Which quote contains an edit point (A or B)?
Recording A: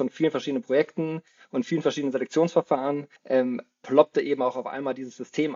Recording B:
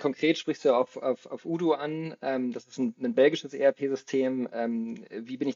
A